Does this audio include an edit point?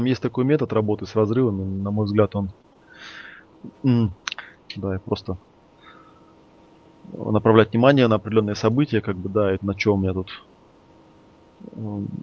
yes; 2 cuts; at 4.7 s, 9.6 s

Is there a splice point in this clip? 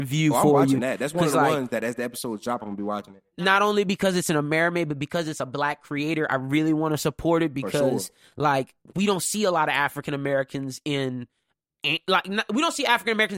no; 0 cuts

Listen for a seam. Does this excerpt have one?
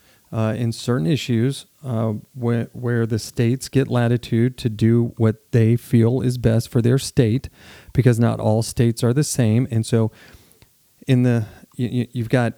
no; 0 cuts

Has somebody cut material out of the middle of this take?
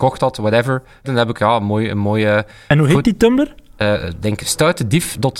yes; 1 cut; at 1.0 s

